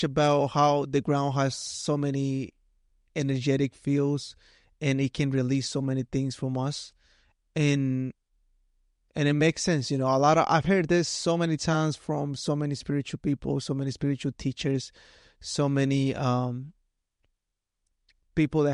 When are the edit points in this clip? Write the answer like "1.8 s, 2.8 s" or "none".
none